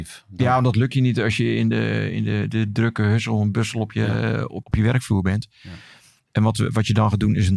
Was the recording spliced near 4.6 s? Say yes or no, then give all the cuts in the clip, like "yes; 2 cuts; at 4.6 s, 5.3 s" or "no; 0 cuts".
yes; 2 cuts; at 4.6 s, 6.2 s